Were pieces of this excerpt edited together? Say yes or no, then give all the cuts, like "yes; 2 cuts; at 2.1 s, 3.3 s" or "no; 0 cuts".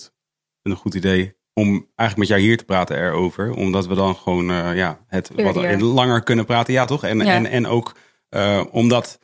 no; 0 cuts